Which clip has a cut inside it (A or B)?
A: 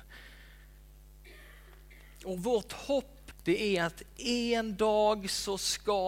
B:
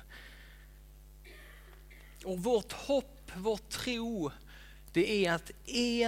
A